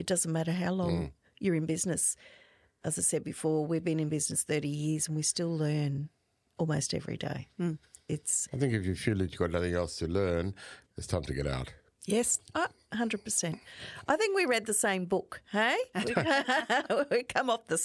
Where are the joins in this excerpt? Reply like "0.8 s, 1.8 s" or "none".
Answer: none